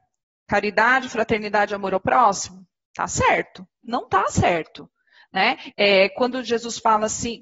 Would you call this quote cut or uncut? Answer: cut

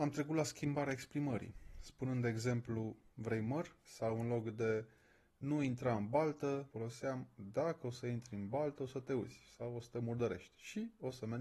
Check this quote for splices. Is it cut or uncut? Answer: uncut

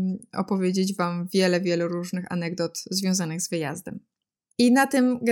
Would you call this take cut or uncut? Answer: uncut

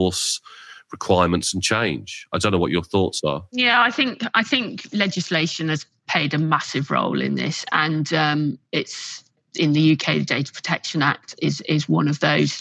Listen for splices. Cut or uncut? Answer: uncut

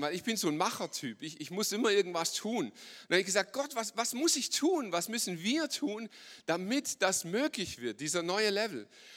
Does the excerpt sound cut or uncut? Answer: uncut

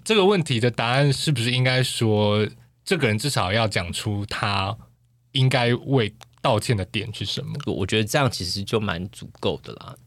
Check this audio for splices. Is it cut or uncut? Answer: cut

